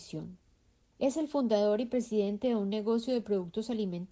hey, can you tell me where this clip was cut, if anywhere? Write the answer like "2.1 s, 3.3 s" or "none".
0.9 s